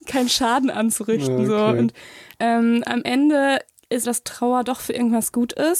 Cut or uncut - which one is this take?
cut